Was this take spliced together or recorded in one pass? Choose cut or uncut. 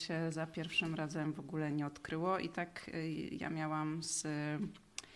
cut